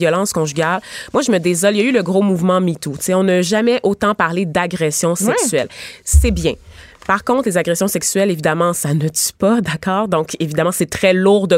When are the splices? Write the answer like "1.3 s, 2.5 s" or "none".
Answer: none